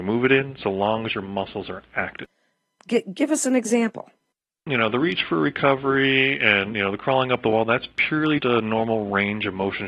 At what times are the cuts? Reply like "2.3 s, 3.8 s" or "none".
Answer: 2.8 s, 8.4 s